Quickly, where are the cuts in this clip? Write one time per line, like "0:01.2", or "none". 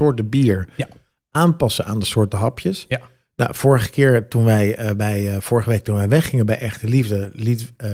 none